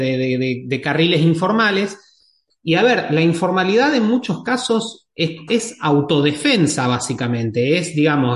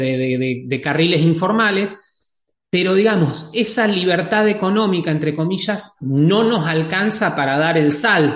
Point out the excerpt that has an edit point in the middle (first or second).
first